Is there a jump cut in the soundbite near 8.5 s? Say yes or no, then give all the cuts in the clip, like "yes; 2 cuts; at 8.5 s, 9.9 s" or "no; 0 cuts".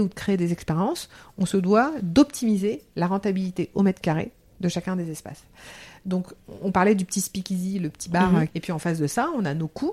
yes; 1 cut; at 8.5 s